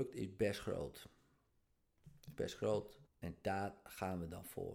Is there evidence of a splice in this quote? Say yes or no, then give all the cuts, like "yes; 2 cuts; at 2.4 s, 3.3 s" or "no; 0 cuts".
yes; 1 cut; at 3.1 s